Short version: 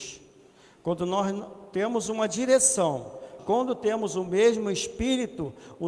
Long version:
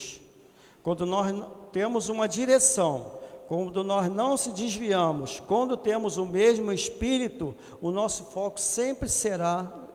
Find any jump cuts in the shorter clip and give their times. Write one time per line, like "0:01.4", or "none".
0:03.4